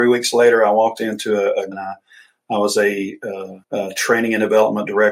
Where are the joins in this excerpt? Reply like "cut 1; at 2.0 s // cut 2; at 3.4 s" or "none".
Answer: cut 1; at 1.7 s // cut 2; at 3.6 s

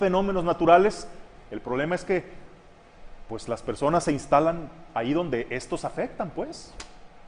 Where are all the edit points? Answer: none

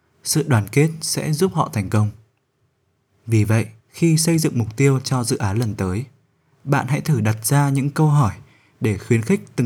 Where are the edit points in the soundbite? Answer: cut 1; at 3.8 s

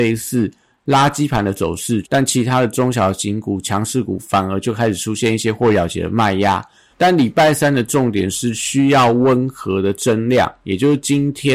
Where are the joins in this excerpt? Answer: cut 1; at 2.0 s // cut 2; at 6.9 s

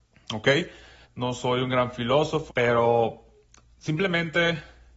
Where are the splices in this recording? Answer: cut 1; at 1.0 s // cut 2; at 2.5 s

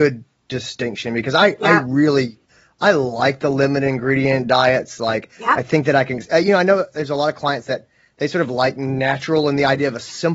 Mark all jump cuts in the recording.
none

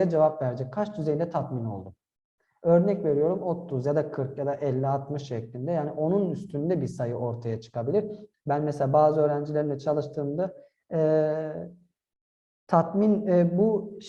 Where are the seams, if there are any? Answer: cut 1; at 8.3 s

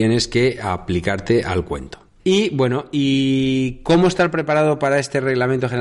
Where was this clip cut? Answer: cut 1; at 2.2 s

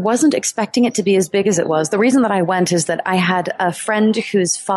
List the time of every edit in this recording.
none

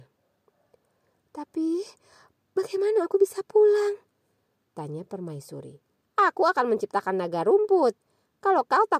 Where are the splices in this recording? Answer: cut 1; at 6.0 s

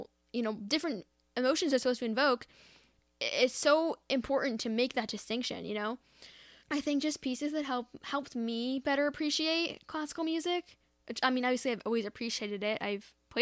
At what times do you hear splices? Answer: cut 1; at 6.6 s

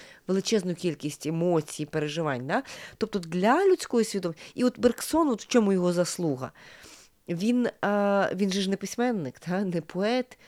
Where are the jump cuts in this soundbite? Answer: none

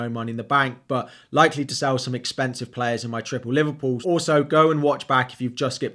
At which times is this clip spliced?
cut 1; at 4.0 s

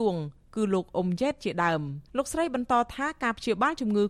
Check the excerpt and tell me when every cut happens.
cut 1; at 2.1 s

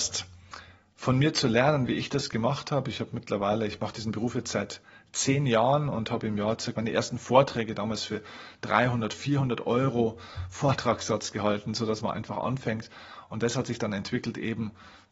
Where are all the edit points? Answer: cut 1; at 6.7 s

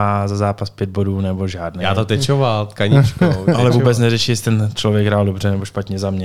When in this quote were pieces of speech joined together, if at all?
none

